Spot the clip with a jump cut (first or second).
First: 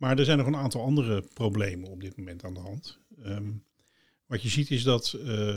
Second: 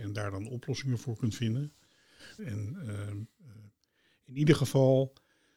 second